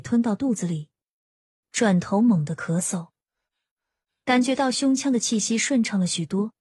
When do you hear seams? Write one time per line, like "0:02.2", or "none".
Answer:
0:01.6